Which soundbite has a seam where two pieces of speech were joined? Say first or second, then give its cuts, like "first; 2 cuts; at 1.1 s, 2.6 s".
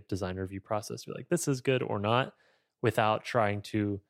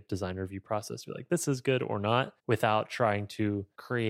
second; 1 cut; at 2.4 s